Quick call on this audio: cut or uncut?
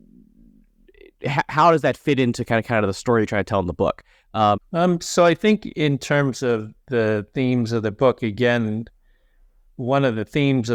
cut